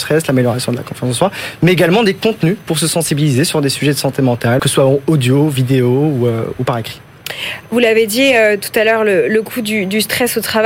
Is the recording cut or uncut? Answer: cut